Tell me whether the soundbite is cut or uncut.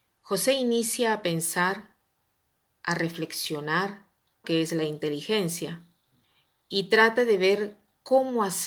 cut